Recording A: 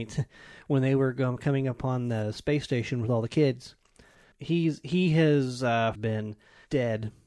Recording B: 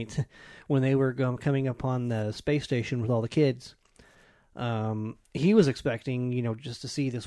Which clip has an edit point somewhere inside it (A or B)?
A